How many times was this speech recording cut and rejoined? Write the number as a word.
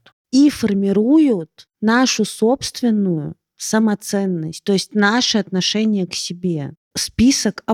one